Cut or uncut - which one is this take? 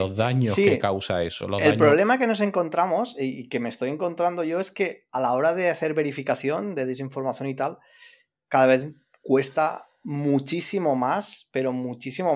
uncut